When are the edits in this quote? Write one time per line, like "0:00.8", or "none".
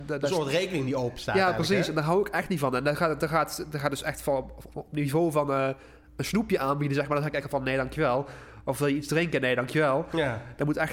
none